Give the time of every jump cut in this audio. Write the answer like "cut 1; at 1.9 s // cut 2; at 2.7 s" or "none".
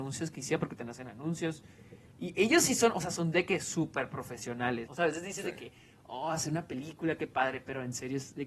cut 1; at 4.9 s